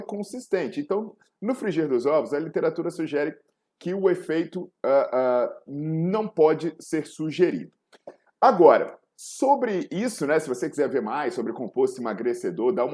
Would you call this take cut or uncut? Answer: uncut